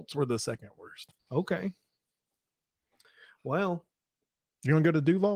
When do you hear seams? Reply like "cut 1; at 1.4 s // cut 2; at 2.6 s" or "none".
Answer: cut 1; at 1.2 s

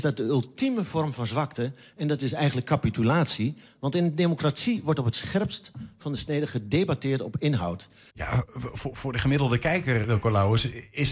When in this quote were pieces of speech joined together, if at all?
cut 1; at 8.1 s // cut 2; at 10.0 s

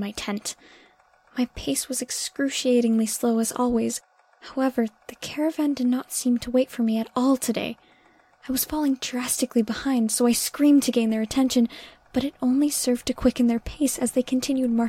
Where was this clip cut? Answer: none

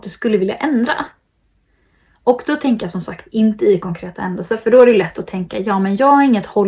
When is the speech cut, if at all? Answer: none

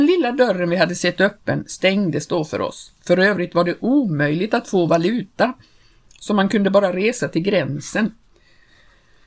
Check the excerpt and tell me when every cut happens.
cut 1; at 3.0 s

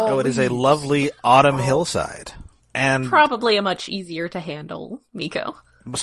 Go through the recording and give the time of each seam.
cut 1; at 2.6 s

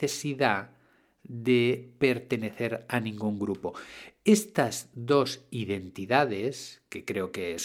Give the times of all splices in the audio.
none

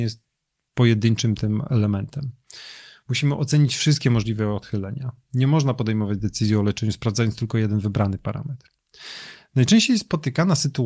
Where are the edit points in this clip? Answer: none

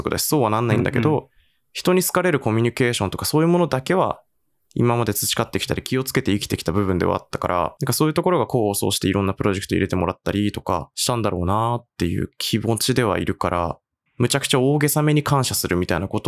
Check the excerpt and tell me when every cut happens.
cut 1; at 14.1 s

